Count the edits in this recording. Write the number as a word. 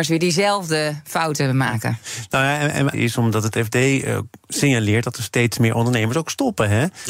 one